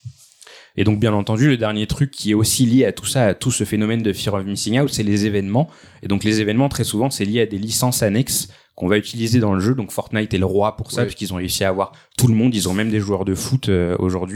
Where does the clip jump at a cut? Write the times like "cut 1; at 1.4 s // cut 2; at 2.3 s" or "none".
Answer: none